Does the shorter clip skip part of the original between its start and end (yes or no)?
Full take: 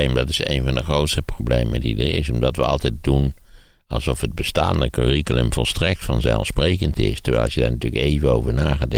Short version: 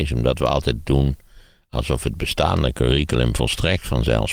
no